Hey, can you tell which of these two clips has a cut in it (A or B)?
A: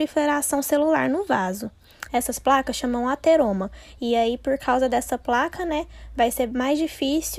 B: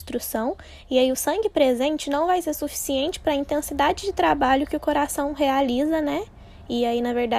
A